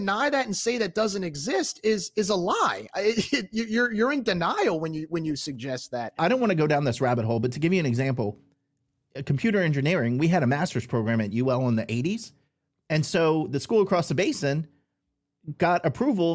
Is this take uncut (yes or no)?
no